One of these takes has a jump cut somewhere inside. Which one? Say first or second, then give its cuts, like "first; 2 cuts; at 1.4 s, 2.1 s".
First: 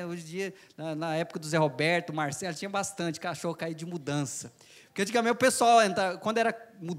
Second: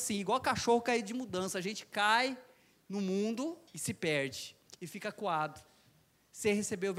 second; 1 cut; at 3.7 s